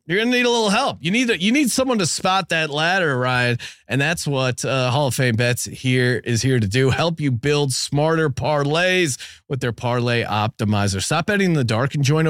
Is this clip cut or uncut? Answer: uncut